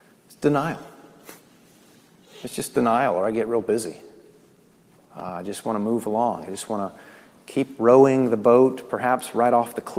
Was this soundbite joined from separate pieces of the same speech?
no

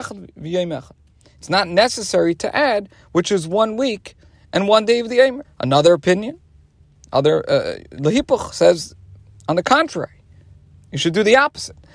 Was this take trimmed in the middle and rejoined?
yes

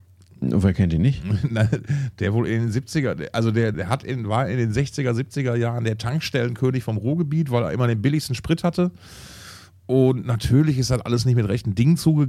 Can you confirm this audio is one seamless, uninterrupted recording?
no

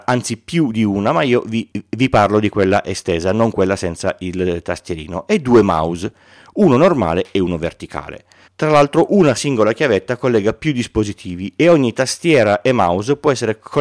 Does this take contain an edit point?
yes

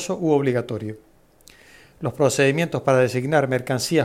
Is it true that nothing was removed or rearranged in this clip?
yes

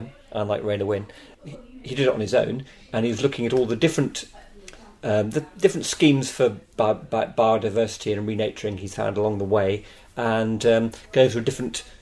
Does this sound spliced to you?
yes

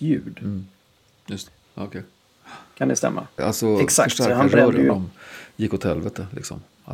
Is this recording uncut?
no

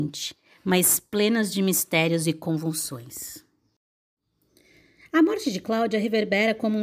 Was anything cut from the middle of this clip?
no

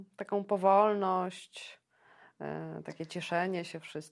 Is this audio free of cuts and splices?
yes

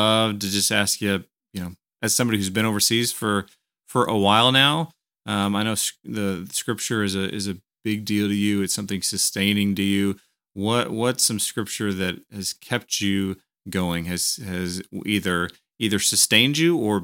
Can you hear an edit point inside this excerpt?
no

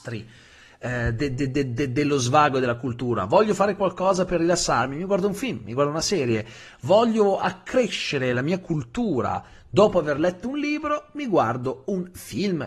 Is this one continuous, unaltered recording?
yes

